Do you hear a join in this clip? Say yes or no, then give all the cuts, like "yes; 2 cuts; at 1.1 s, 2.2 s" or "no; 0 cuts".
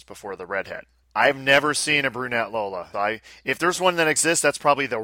yes; 1 cut; at 2.9 s